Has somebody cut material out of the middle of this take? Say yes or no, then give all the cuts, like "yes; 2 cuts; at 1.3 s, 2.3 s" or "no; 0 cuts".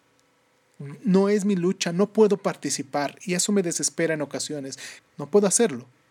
yes; 1 cut; at 5.0 s